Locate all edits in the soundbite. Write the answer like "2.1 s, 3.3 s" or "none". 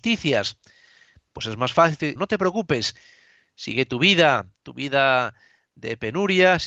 2.2 s